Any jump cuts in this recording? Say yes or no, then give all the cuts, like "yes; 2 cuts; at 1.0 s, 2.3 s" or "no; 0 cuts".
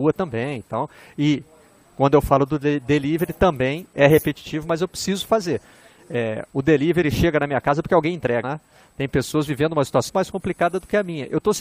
yes; 2 cuts; at 8.4 s, 10.1 s